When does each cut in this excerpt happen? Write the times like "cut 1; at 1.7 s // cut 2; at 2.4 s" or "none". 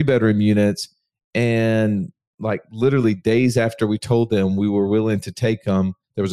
none